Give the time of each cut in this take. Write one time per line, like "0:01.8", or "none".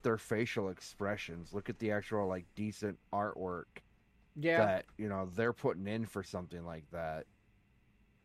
none

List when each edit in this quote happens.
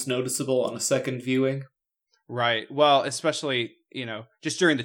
none

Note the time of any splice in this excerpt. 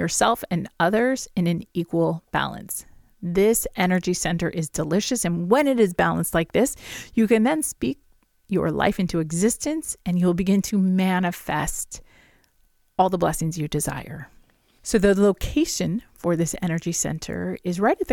none

